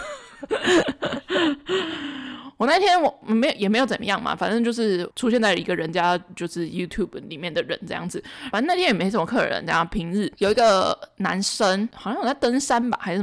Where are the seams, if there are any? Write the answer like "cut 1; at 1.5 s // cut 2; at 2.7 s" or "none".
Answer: none